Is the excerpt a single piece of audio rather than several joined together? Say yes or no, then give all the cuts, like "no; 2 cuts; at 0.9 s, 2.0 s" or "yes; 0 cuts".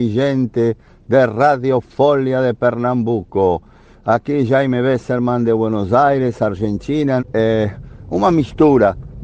no; 1 cut; at 7.2 s